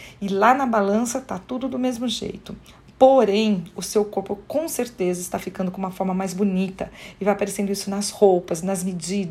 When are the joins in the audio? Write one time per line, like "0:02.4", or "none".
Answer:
none